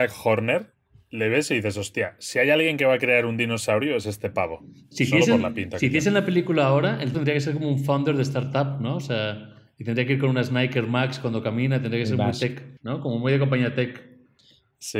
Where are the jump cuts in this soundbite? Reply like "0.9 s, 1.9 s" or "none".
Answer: 7.1 s, 12.8 s